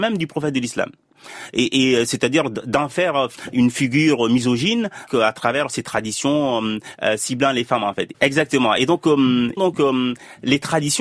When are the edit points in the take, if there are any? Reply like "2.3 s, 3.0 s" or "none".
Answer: 8.1 s, 9.6 s